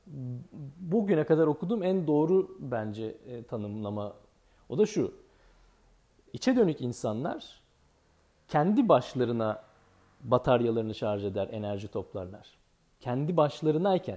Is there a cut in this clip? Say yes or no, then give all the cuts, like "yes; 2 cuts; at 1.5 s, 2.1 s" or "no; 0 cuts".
yes; 1 cut; at 6.3 s